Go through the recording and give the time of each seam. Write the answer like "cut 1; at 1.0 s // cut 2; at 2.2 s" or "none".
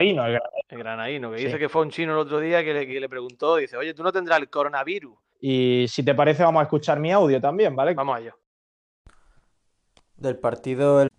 cut 1; at 5.3 s // cut 2; at 8.0 s